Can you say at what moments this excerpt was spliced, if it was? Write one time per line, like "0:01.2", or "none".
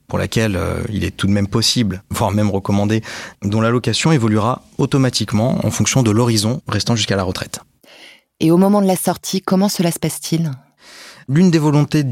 0:03.3